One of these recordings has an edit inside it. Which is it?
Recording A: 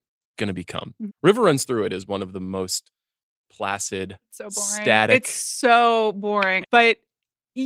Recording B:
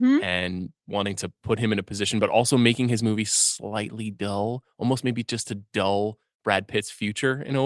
A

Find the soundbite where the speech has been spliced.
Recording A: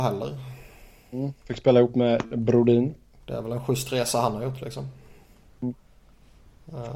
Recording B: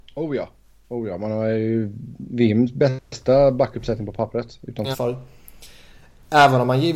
B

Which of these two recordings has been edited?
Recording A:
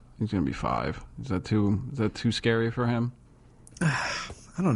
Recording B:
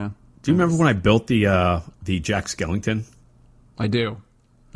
B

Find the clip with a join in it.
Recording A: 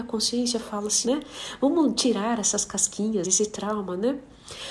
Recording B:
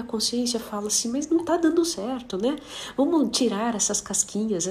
A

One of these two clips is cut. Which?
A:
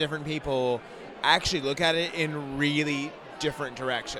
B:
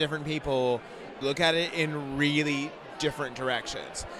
B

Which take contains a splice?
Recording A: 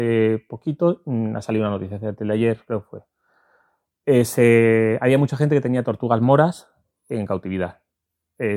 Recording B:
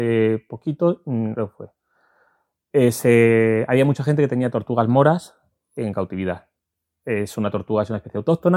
B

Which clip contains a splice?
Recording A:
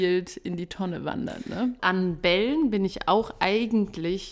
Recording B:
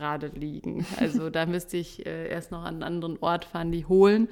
A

